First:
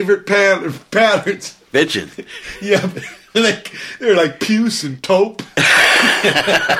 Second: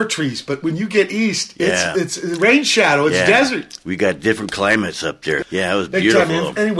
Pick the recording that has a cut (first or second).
second